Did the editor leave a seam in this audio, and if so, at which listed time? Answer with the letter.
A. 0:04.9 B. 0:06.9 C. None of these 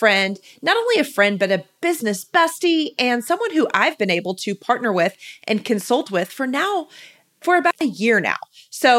C